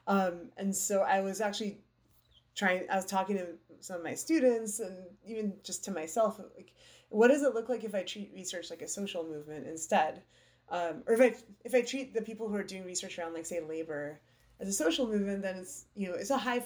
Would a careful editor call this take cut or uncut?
uncut